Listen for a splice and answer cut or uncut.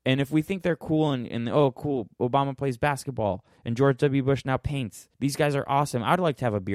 cut